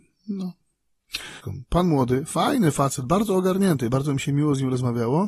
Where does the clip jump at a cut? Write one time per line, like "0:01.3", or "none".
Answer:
0:01.4